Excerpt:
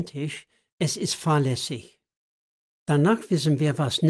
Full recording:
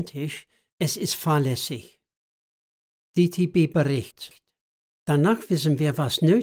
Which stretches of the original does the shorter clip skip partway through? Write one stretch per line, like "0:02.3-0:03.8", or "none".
0:02.7-0:04.9